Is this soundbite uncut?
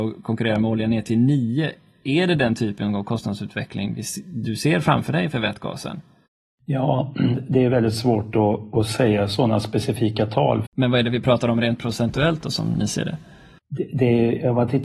no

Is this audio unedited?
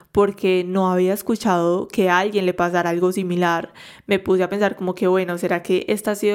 yes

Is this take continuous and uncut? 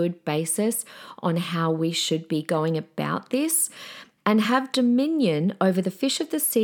no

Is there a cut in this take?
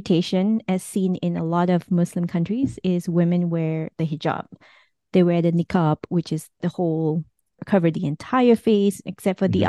no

